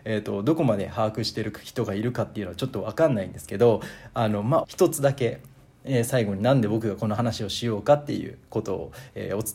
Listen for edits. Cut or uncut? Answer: cut